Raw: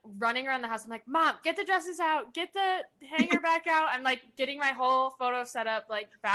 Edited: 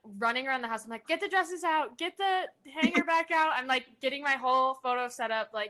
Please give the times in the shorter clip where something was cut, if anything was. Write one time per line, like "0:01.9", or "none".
0:01.0